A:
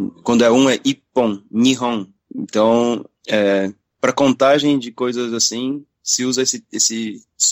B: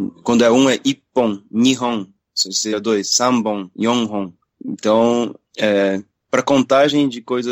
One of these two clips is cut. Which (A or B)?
A